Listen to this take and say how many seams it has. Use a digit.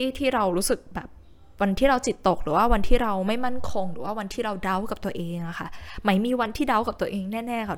0